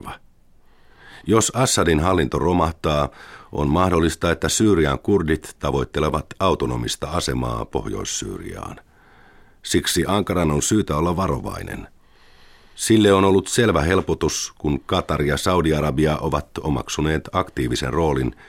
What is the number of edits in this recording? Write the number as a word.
zero